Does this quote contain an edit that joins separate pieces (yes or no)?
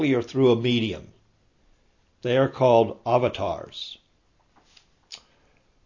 no